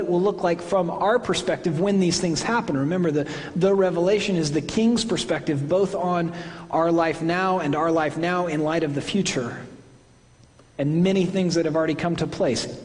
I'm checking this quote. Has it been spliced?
no; 0 cuts

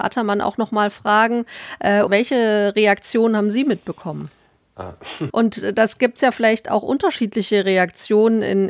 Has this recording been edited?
yes; 2 cuts; at 2.1 s, 5.3 s

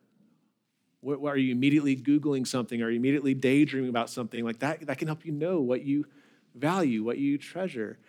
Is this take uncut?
yes; 0 cuts

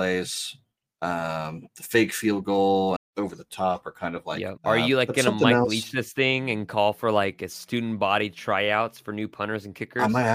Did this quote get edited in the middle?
yes; 2 cuts; at 3.0 s, 4.6 s

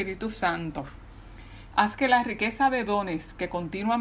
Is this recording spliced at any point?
yes; 1 cut; at 1.7 s

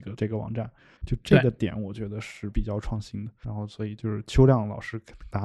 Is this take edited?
yes; 2 cuts; at 1.0 s, 3.4 s

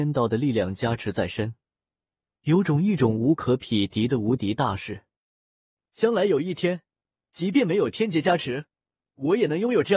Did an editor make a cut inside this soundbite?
no; 0 cuts

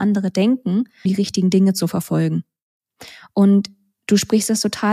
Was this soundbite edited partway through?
yes; 1 cut; at 1.1 s

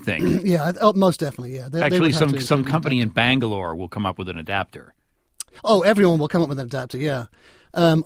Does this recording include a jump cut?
no; 0 cuts

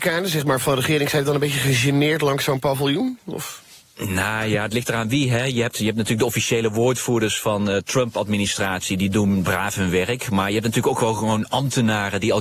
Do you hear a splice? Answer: no; 0 cuts

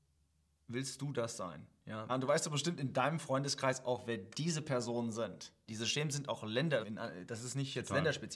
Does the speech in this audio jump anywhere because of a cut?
yes; 3 cuts; at 2.1 s, 5.7 s, 6.8 s

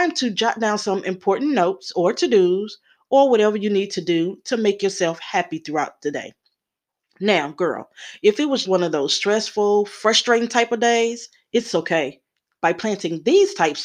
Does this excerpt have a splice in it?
yes; 2 cuts; at 8.6 s, 12.6 s

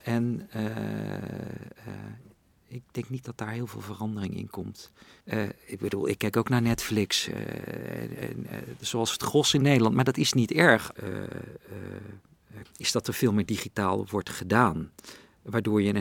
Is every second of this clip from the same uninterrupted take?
no; 3 cuts; at 5.2 s, 11.0 s, 12.7 s

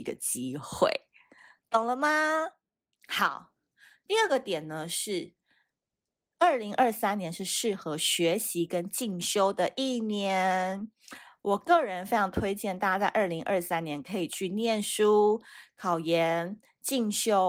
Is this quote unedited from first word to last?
yes; 0 cuts

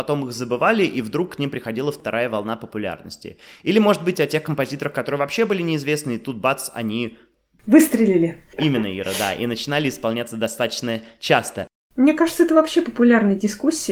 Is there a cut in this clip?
no; 0 cuts

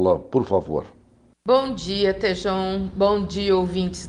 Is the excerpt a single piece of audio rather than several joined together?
yes; 0 cuts

